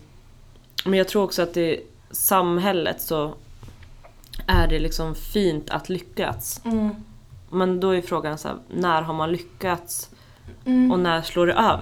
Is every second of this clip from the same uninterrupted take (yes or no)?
yes